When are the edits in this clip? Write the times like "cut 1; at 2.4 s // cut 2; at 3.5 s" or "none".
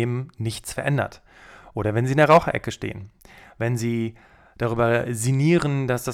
none